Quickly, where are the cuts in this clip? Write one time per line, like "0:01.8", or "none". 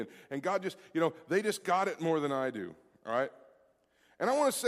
none